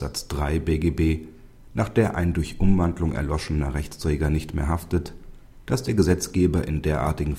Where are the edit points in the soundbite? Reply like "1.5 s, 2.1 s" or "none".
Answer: 5.6 s